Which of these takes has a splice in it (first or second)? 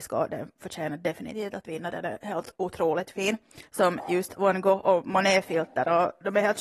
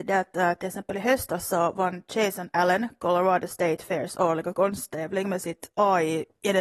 first